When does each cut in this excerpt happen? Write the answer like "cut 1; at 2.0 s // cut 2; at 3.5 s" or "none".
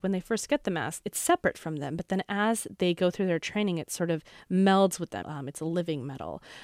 cut 1; at 1.0 s // cut 2; at 5.2 s

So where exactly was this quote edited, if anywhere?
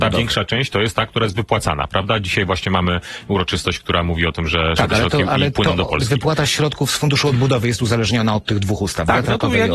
none

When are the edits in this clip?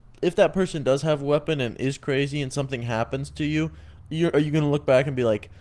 none

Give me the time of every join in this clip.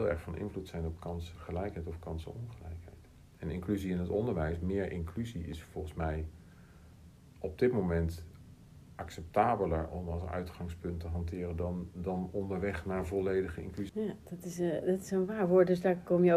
cut 1; at 13.9 s

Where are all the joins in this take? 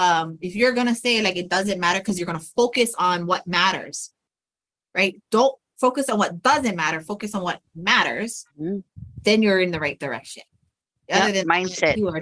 cut 1; at 8.5 s

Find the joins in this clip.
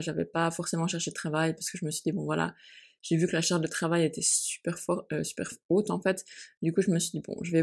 none

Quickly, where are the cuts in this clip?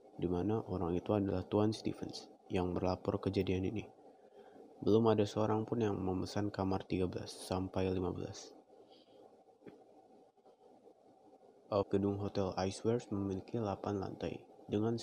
cut 1; at 11.8 s

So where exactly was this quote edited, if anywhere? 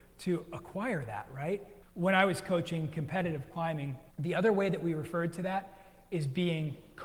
cut 1; at 1.8 s // cut 2; at 4.1 s

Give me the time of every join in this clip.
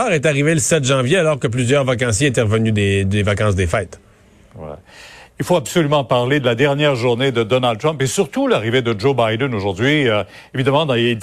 none

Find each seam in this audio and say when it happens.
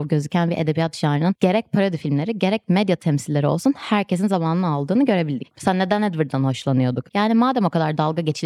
cut 1; at 5.5 s // cut 2; at 7.1 s

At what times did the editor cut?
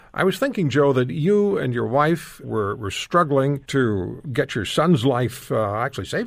cut 1; at 2.4 s // cut 2; at 3.6 s

